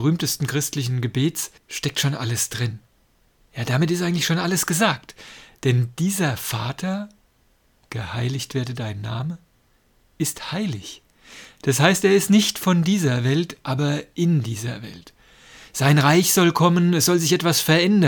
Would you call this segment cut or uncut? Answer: uncut